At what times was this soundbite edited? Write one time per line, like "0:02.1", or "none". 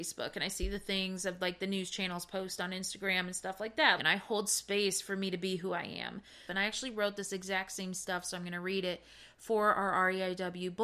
0:04.0
0:06.5